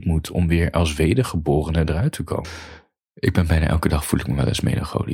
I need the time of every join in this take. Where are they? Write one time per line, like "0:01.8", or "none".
0:02.4